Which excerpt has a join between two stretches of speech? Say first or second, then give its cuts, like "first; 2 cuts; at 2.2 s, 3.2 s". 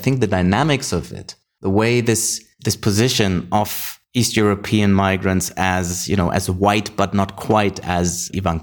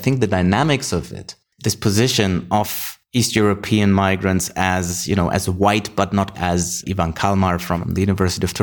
second; 2 cuts; at 1.5 s, 6.3 s